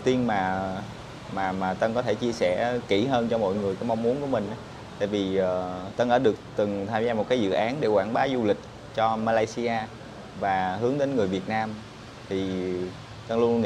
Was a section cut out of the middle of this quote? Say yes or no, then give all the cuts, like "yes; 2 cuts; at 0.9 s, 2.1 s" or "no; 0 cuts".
no; 0 cuts